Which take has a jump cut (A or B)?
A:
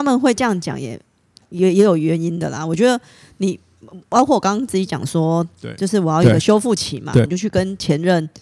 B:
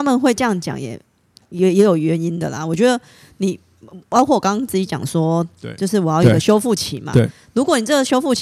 A